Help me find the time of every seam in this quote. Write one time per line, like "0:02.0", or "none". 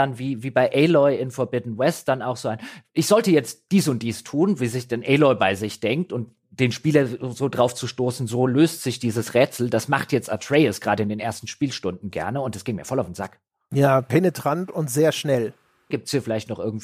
0:15.9